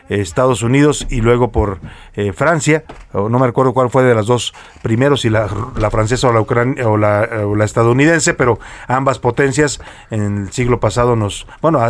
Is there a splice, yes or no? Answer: no